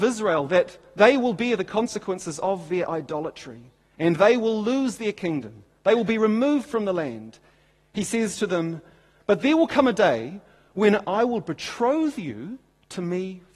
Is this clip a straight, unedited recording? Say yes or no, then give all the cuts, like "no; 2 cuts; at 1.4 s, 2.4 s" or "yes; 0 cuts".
no; 1 cut; at 11.0 s